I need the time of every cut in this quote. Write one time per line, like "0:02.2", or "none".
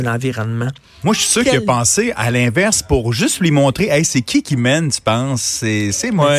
none